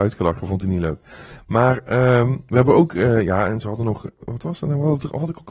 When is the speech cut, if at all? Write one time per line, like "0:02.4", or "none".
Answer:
0:04.2